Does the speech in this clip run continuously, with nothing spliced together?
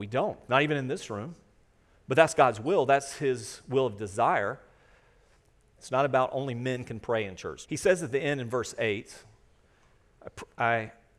no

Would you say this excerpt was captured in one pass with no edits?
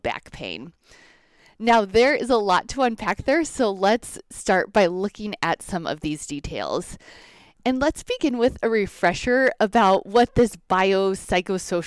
yes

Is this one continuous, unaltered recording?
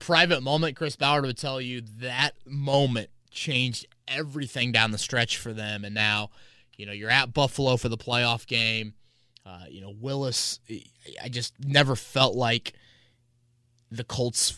yes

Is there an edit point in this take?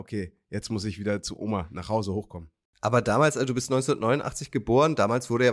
no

